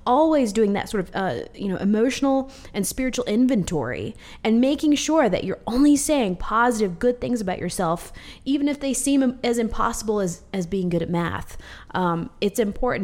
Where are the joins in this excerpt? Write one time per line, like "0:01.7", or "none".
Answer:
none

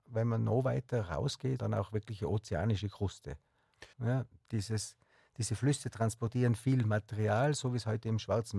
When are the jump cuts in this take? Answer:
0:01.6
0:03.9

